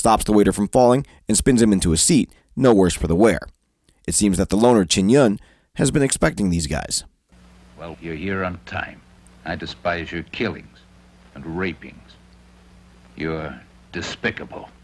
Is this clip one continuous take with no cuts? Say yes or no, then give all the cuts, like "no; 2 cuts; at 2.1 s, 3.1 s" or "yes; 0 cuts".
no; 2 cuts; at 7.9 s, 9.3 s